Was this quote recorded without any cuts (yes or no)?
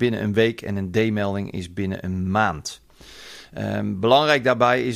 yes